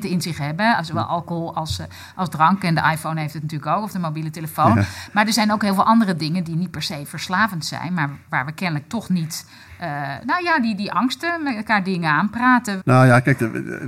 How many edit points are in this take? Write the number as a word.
one